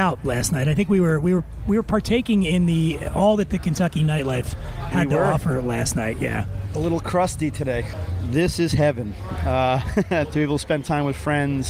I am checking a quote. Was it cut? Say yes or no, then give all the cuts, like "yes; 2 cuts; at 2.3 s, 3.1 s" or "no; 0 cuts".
yes; 1 cut; at 10.2 s